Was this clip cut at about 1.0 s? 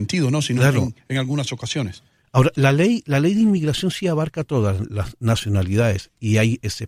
no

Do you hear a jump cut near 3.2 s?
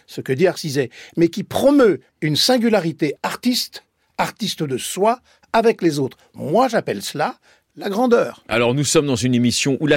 no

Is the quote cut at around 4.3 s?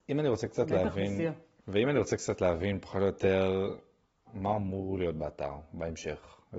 yes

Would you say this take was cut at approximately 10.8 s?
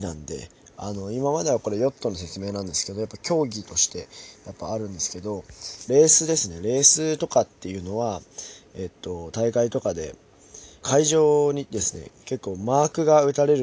yes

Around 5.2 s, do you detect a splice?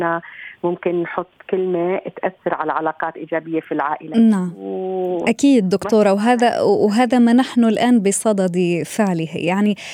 no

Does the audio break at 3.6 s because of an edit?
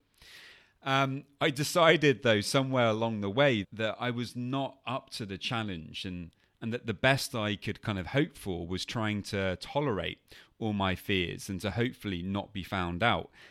yes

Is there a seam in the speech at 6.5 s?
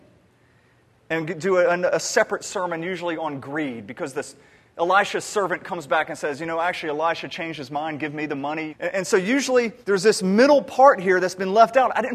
no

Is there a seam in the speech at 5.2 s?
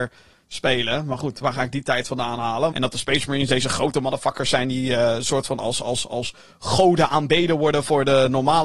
no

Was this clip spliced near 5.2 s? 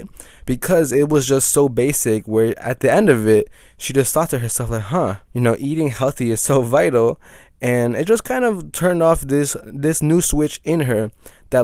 yes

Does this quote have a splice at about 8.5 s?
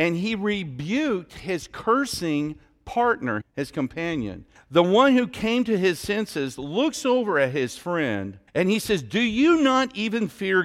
yes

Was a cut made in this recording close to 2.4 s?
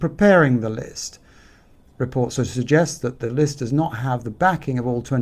yes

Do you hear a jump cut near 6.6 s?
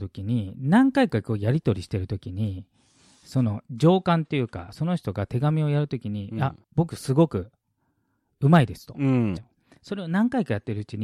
yes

